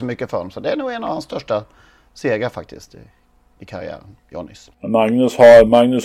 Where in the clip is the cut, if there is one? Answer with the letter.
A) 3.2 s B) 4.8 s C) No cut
C